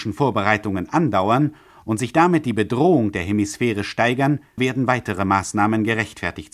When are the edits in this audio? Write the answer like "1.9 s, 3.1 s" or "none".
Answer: 4.6 s